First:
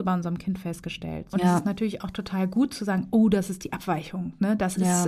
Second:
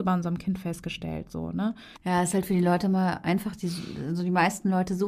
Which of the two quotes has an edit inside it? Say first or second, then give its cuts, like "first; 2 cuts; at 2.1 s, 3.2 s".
first; 1 cut; at 1.3 s